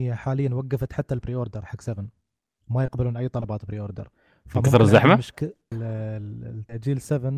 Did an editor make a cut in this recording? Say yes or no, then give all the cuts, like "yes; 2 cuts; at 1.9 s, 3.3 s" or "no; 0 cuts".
yes; 1 cut; at 5.7 s